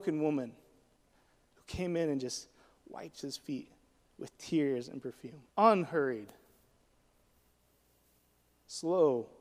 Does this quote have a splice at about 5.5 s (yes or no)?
yes